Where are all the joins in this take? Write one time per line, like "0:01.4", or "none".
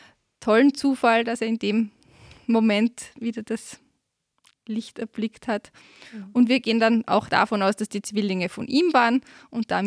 none